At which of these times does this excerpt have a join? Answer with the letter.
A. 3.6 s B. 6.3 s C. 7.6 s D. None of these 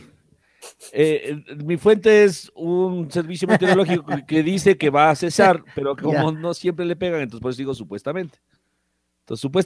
D